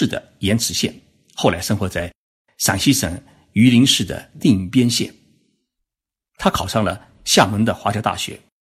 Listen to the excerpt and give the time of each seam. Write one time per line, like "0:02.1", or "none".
none